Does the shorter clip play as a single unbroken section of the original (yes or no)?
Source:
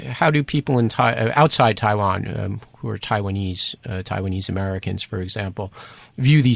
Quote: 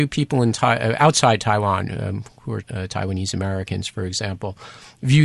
no